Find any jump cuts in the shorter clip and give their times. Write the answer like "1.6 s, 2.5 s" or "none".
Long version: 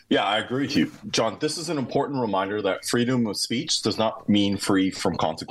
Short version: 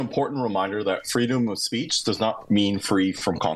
none

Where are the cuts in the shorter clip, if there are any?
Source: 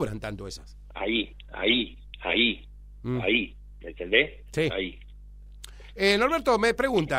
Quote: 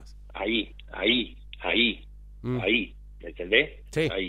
none

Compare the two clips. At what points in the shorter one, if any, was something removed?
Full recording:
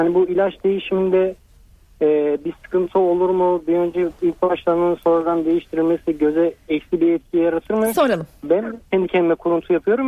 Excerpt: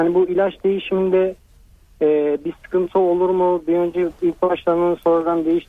none

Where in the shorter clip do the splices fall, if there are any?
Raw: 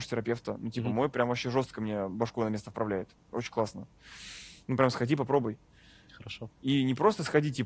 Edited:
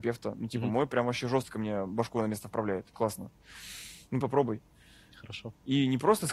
2.9 s, 4.2 s

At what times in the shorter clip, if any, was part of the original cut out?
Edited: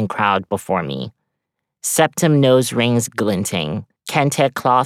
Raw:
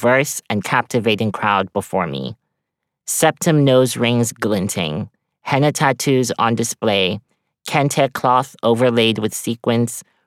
4.0 s

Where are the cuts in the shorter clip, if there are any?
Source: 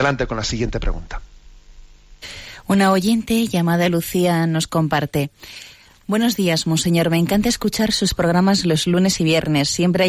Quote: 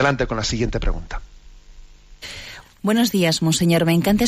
2.6 s

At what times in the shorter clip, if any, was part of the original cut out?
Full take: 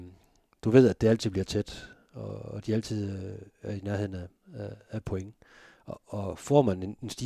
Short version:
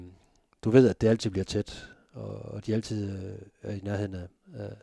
none

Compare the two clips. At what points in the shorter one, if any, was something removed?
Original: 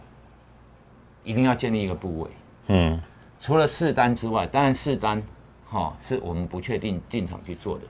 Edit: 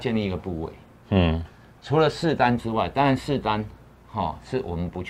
none

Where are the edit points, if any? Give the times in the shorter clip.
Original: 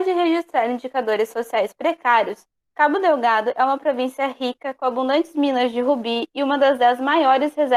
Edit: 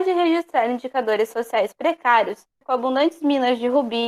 2.6 s

